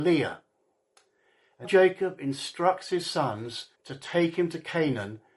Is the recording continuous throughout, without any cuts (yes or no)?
no